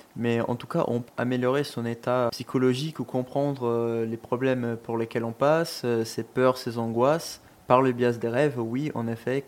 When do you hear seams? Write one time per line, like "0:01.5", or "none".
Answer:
0:01.1
0:02.3